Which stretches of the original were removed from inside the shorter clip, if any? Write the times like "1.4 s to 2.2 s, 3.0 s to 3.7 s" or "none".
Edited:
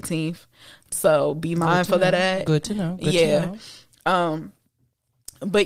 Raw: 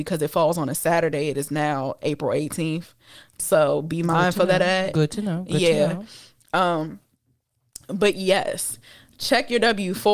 none